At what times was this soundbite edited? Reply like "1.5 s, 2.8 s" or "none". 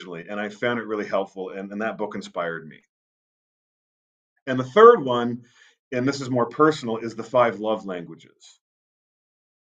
none